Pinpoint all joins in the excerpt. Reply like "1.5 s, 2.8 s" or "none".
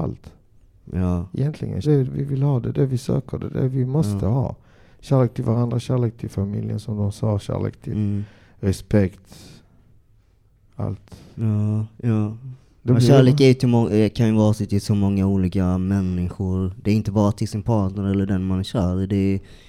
1.8 s